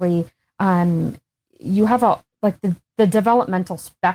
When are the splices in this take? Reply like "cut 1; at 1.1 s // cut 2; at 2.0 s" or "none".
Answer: none